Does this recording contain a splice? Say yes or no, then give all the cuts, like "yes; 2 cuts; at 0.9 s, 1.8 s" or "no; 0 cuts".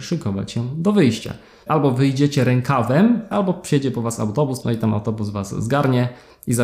yes; 3 cuts; at 1.7 s, 3.3 s, 4.6 s